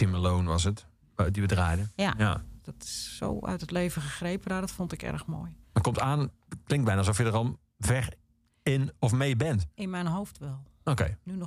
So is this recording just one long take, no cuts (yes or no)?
no